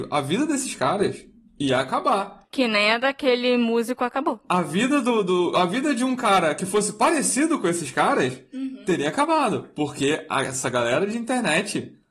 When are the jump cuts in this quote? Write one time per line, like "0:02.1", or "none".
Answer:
none